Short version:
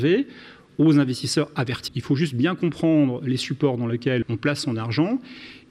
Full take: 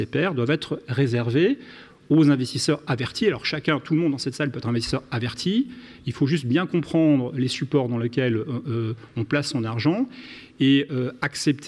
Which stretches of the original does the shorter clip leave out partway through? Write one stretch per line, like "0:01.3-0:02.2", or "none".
0:03.2-0:06.0
0:08.3-0:09.1